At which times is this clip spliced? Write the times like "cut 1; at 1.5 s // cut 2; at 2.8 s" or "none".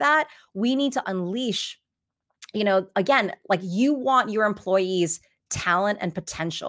cut 1; at 1.0 s